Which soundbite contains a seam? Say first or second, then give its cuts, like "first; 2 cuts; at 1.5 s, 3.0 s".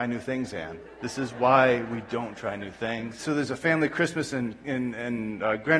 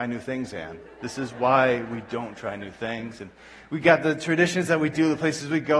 first; 1 cut; at 3.2 s